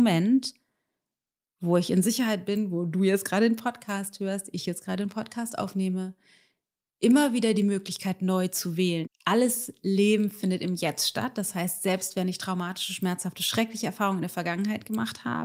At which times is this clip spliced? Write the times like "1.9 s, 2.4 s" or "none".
9.0 s